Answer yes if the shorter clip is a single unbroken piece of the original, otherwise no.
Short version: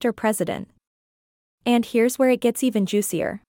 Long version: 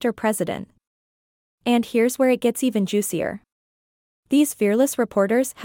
yes